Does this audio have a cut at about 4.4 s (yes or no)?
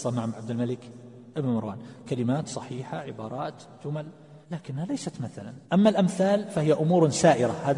yes